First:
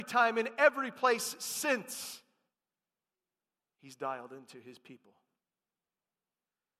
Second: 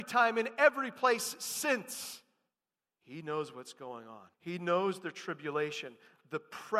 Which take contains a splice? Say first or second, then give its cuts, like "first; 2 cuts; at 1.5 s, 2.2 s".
second; 2 cuts; at 2.8 s, 4.3 s